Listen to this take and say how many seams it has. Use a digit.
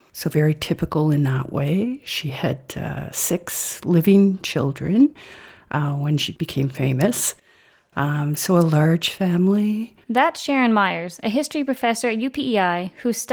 0